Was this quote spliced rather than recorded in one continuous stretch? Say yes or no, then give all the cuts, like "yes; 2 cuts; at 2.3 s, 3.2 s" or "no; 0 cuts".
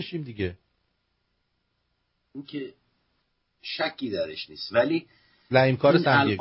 yes; 1 cut; at 5.5 s